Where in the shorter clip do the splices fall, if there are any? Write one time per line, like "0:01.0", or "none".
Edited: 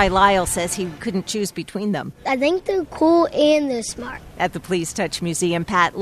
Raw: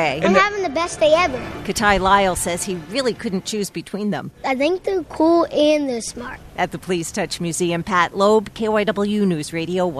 0:01.0

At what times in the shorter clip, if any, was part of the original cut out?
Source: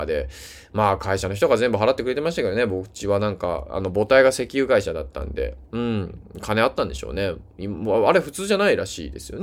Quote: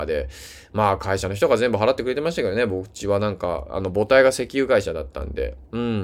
none

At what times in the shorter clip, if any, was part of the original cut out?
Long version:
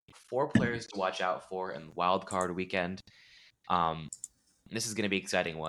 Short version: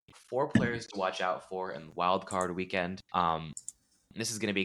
0:03.0

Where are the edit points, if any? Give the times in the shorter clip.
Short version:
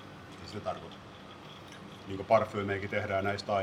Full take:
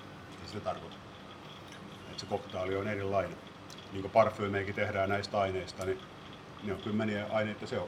0:02.0

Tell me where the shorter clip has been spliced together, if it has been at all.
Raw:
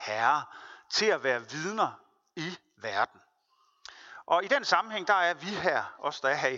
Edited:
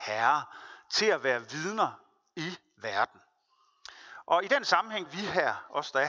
0:05.1

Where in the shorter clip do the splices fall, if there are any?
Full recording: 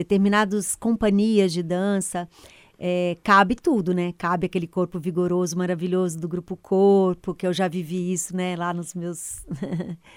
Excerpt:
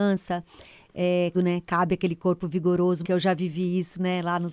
0:01.3
0:03.0

